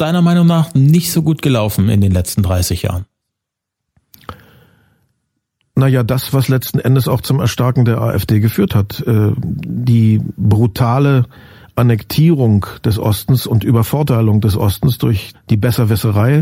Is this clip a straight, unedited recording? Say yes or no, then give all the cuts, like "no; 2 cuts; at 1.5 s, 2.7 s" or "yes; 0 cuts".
no; 1 cut; at 15.3 s